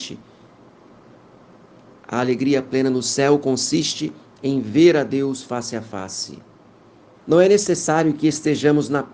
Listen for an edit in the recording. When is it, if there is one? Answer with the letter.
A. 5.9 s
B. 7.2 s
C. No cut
B